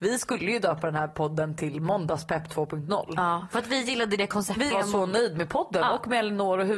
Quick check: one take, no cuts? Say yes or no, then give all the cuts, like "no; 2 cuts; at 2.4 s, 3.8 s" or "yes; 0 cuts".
no; 1 cut; at 4.7 s